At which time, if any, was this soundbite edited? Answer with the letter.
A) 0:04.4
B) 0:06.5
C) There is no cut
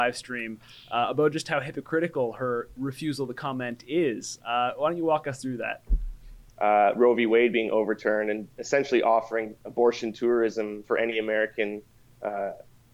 B